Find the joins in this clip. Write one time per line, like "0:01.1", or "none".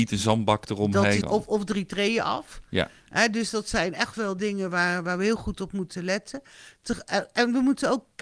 0:01.2